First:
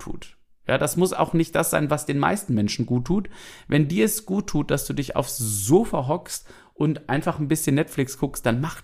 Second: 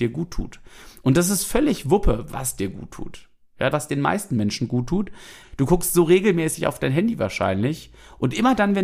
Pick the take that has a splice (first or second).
second